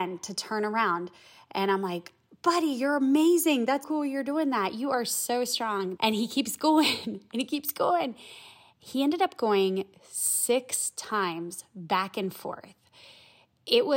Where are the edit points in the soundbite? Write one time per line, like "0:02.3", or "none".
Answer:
0:03.8
0:06.0